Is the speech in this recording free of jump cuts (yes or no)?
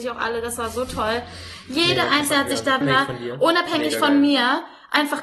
no